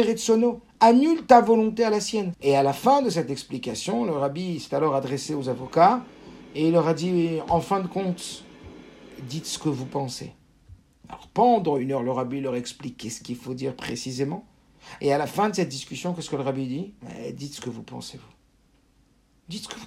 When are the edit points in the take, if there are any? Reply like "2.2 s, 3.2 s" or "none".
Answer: 2.3 s